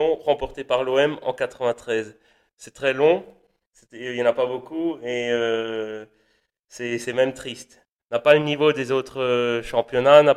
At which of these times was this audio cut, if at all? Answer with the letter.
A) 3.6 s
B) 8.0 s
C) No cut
B